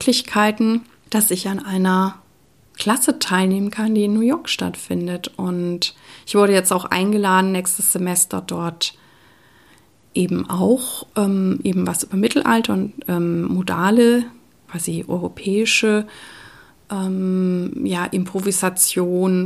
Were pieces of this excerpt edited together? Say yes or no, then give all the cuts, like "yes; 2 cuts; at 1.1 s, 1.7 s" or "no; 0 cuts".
no; 0 cuts